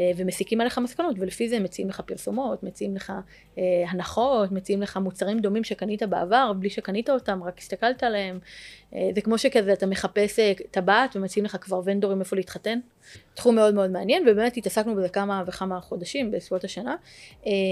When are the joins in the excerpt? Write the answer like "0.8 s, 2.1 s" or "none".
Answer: 13.1 s